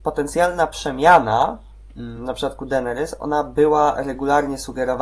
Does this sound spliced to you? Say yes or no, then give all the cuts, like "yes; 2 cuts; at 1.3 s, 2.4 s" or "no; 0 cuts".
no; 0 cuts